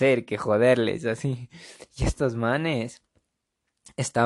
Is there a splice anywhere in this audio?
no; 0 cuts

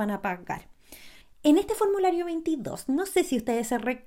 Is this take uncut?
no; 1 cut; at 1.2 s

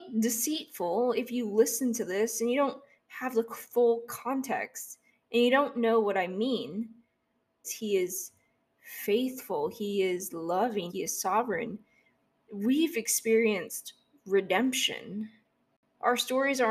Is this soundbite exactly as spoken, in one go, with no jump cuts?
no; 2 cuts; at 7.6 s, 10.9 s

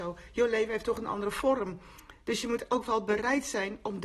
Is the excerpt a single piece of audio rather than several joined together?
yes; 0 cuts

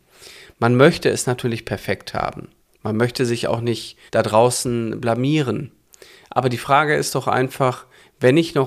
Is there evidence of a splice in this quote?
yes; 1 cut; at 4.1 s

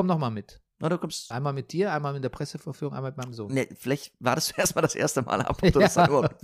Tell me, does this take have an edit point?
yes; 1 cut; at 1.3 s

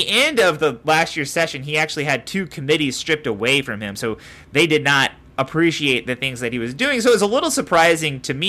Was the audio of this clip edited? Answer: no; 0 cuts

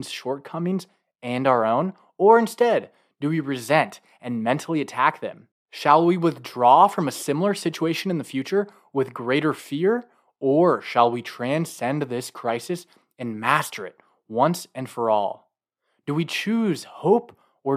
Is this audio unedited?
yes; 0 cuts

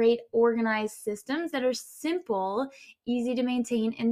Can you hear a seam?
no; 0 cuts

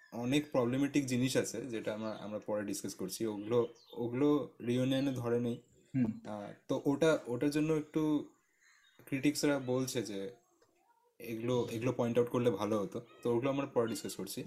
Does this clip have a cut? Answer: no; 0 cuts

